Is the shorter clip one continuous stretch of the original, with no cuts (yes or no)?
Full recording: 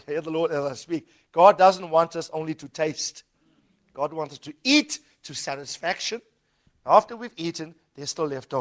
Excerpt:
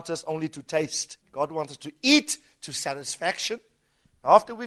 no